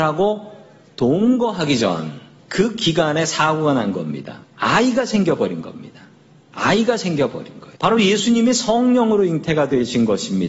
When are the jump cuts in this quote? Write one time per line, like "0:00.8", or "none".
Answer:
0:02.4
0:04.4
0:07.8